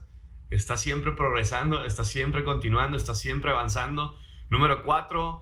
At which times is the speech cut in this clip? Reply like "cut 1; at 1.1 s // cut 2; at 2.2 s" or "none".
none